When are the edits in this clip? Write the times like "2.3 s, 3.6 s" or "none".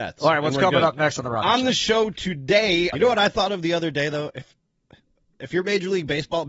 2.9 s